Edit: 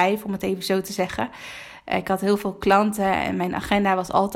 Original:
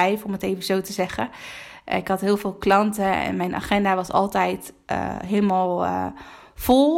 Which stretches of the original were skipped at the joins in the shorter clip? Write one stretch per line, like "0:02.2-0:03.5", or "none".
none